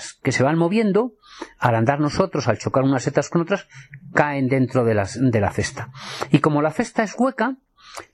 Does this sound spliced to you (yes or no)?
no